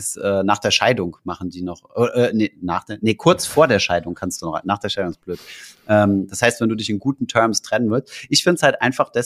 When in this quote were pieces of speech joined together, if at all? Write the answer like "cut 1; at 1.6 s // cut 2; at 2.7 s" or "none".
none